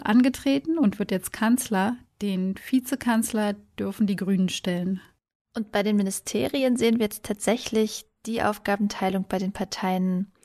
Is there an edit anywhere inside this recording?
no; 0 cuts

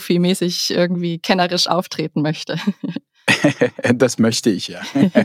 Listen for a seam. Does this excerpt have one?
no; 0 cuts

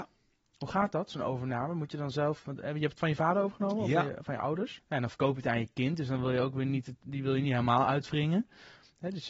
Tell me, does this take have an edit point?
yes; 1 cut; at 4.8 s

